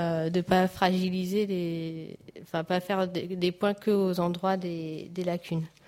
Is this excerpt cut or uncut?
uncut